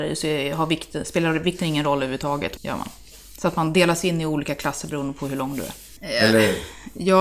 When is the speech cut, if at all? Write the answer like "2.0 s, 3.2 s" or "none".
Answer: 2.6 s, 6.0 s